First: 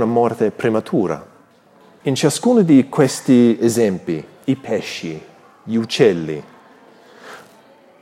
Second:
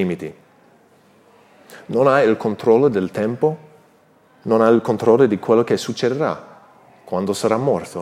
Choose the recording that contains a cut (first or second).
first